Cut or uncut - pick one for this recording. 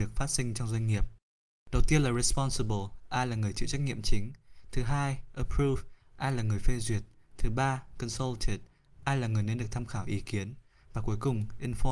uncut